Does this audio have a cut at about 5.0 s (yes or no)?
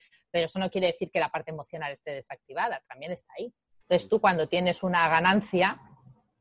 no